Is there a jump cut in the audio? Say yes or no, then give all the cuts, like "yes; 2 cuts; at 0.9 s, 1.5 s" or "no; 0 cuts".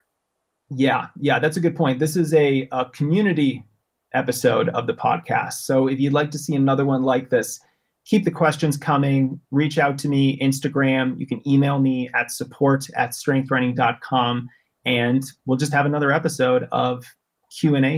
no; 0 cuts